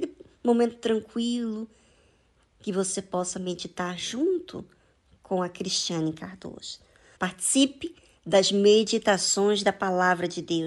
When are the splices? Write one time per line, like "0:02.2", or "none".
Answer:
0:07.2